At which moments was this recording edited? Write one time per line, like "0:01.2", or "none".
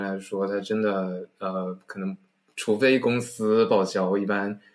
none